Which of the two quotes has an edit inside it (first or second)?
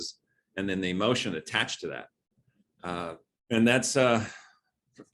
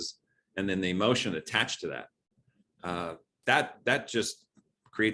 first